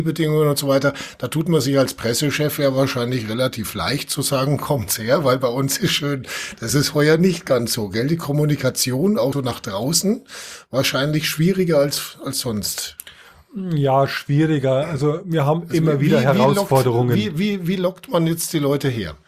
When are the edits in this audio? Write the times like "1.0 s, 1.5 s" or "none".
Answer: 9.3 s